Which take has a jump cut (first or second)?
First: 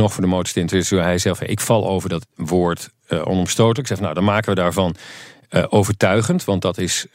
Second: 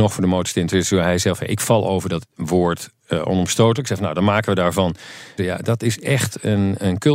second